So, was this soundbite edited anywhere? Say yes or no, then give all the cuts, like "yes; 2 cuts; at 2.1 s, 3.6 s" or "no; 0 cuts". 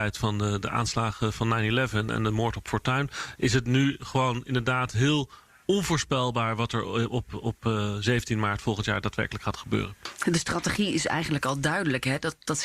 no; 0 cuts